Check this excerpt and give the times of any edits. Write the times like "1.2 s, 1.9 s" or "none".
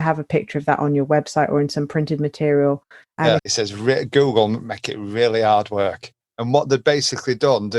3.4 s, 6.2 s